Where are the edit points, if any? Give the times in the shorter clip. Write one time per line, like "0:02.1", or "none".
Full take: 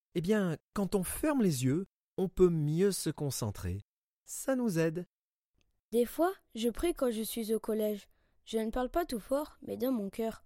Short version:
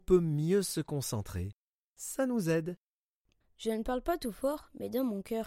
0:03.4